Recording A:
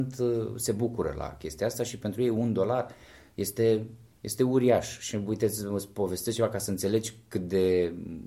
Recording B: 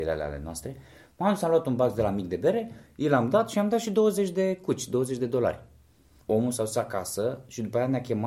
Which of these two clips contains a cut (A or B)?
B